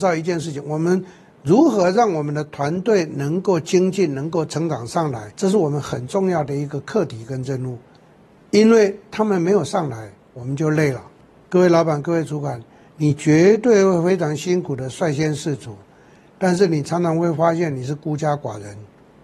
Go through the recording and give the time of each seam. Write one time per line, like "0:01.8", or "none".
none